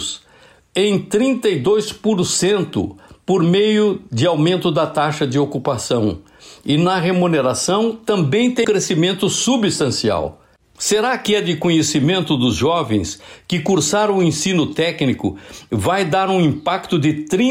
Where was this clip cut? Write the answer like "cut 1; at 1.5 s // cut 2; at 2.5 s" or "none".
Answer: cut 1; at 8.6 s // cut 2; at 10.8 s